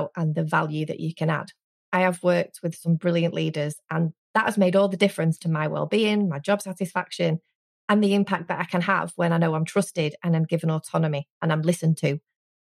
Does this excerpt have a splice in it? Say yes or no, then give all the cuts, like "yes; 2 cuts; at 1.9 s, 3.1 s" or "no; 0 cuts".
no; 0 cuts